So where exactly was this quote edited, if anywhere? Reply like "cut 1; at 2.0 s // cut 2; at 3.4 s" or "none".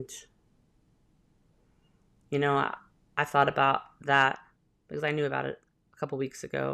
none